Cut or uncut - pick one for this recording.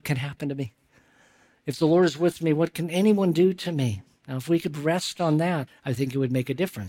cut